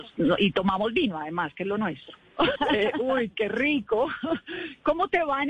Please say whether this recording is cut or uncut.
cut